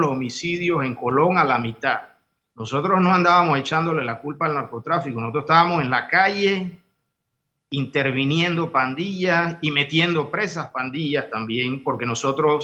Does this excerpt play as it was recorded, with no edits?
no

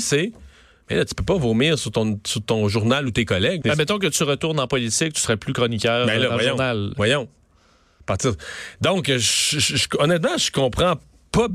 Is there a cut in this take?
yes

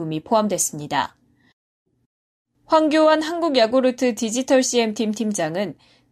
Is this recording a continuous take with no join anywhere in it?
yes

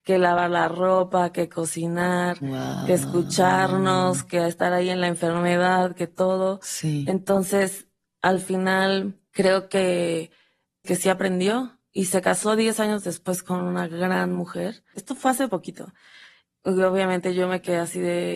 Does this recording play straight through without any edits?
no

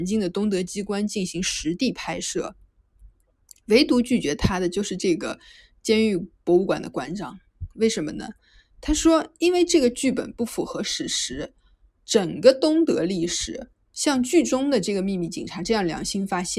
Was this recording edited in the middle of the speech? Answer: no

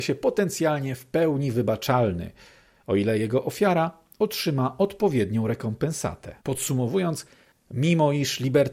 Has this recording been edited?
yes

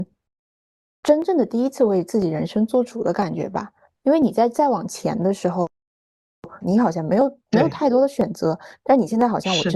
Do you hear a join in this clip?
yes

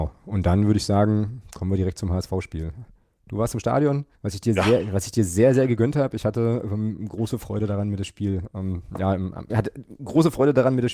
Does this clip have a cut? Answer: yes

